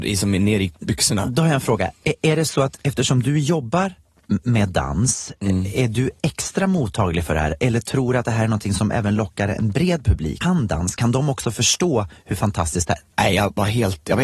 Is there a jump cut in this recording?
yes; 2 cuts; at 10.4 s, 13.0 s

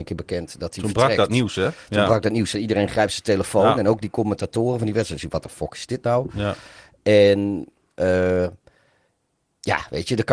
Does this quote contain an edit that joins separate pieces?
no; 0 cuts

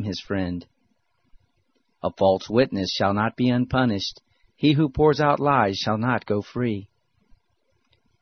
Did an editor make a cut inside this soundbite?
no; 0 cuts

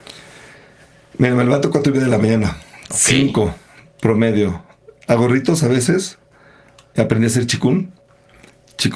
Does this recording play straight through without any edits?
yes; 0 cuts

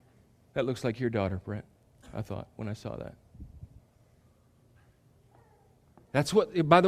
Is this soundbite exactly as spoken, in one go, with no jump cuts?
yes; 0 cuts

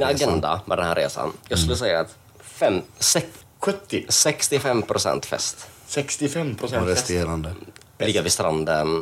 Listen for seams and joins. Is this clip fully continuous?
no; 1 cut; at 8.0 s

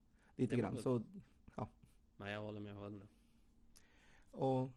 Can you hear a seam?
no; 0 cuts

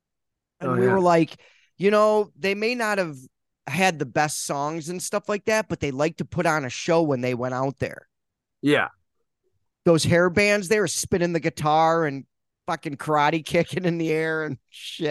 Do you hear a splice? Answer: no; 0 cuts

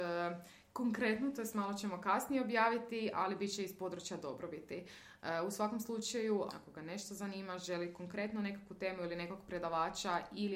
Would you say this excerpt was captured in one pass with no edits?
no; 1 cut; at 6.5 s

